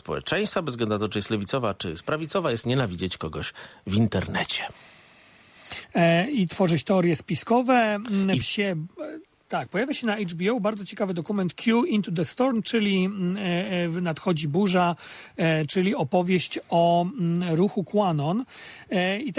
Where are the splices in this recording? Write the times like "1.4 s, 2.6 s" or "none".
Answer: 8.4 s, 15.7 s